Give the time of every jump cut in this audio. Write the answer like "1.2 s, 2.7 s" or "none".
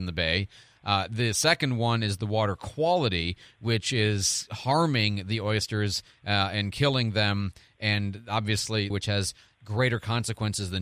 8.9 s

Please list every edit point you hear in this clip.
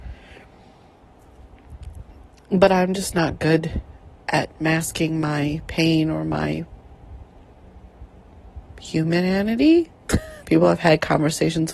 10.4 s

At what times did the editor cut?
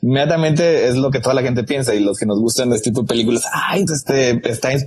2.7 s, 3.9 s

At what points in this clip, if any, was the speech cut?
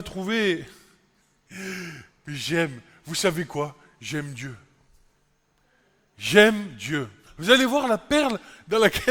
7.3 s

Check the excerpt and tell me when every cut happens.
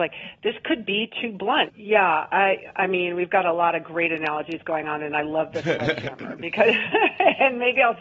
1.7 s

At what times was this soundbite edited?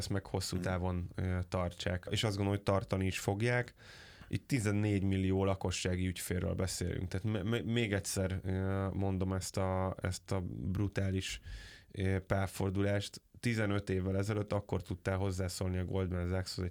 none

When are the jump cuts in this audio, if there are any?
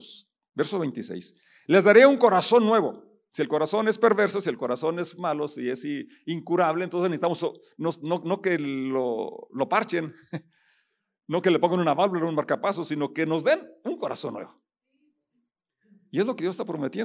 none

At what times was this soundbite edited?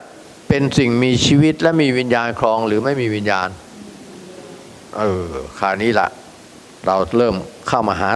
none

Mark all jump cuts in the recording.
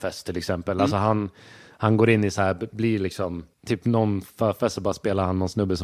3.5 s

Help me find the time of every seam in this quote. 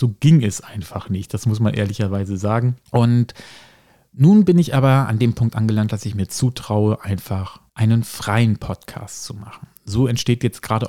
2.9 s, 7.7 s

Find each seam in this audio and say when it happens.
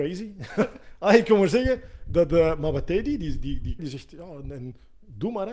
3.8 s

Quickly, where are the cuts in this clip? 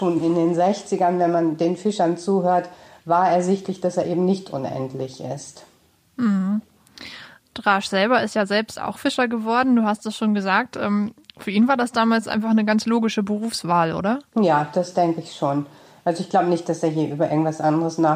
14.3 s

